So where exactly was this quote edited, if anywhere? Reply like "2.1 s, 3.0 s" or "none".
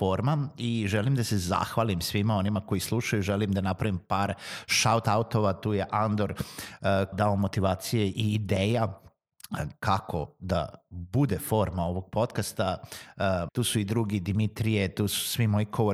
7.1 s, 13.5 s